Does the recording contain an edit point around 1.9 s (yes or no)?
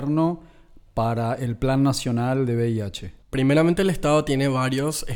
no